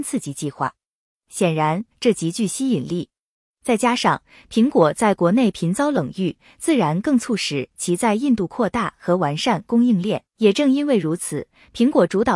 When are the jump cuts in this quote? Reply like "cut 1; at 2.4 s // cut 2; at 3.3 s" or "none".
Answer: cut 1; at 1.9 s // cut 2; at 10.3 s